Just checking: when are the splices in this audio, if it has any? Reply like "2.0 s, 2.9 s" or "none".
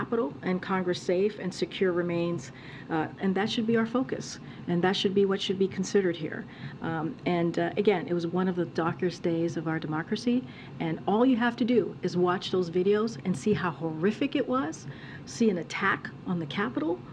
3.2 s, 15.2 s